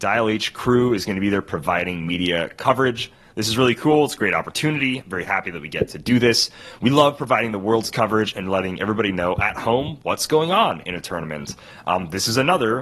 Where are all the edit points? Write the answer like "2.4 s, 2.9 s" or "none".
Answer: none